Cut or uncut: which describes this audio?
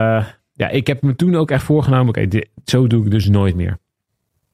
uncut